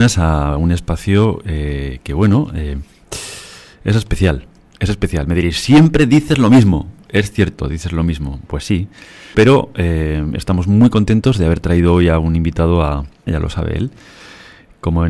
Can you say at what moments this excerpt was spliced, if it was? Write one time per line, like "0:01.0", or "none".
0:09.3
0:13.3